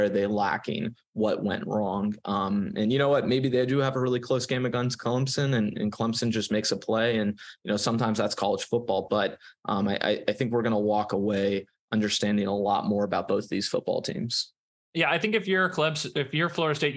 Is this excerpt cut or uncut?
uncut